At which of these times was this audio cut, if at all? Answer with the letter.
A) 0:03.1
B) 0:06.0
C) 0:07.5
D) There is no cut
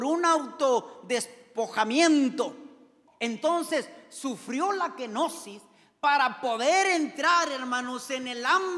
A